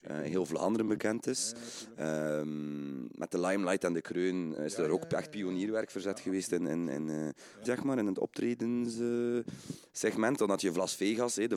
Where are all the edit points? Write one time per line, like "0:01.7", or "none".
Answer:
0:04.6
0:07.6